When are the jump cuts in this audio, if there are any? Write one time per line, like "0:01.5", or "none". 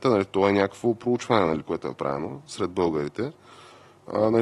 none